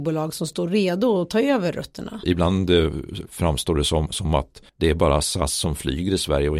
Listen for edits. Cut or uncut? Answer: cut